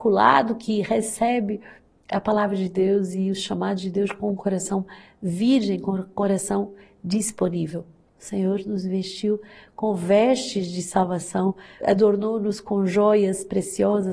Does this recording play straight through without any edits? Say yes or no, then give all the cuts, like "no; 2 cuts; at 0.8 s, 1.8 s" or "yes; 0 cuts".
no; 2 cuts; at 8.1 s, 11.8 s